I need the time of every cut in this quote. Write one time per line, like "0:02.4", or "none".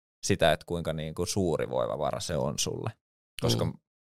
none